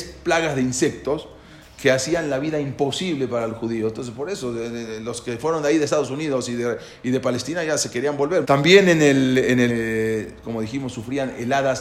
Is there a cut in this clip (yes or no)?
yes